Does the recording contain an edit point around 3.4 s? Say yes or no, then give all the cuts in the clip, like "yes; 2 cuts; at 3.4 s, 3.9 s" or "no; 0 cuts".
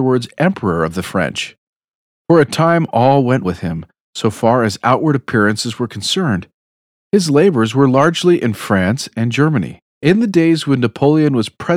yes; 3 cuts; at 3.4 s, 6.9 s, 9.9 s